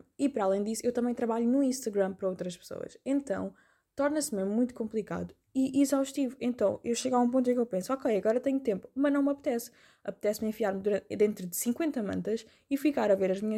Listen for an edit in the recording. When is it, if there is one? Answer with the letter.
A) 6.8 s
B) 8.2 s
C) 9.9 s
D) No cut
D